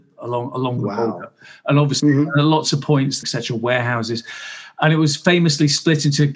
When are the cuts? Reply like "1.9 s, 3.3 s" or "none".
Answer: 3.2 s